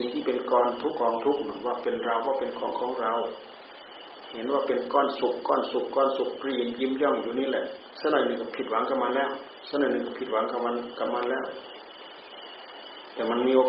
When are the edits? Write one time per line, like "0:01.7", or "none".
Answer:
0:00.9